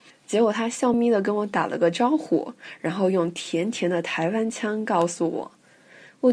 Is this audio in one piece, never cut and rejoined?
no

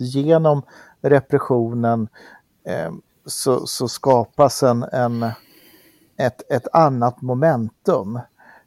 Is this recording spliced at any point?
no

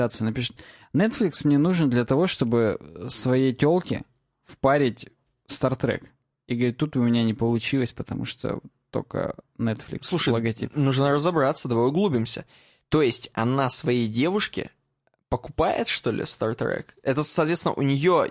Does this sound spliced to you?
no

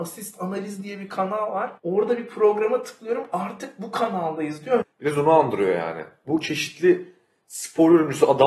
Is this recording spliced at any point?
yes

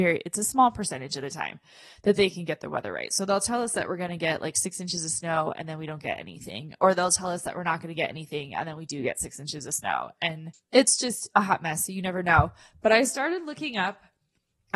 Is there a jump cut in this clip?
no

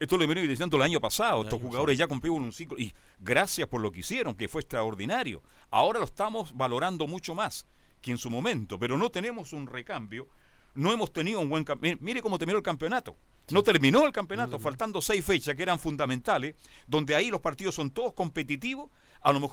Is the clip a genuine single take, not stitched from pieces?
yes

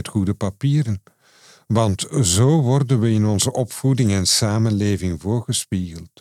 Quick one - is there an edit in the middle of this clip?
no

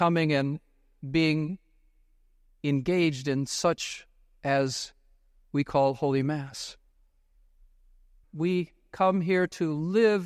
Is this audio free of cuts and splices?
no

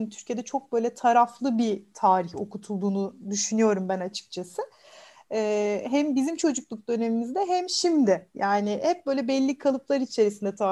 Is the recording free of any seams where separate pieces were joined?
yes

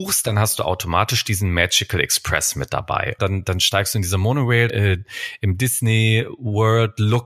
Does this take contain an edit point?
yes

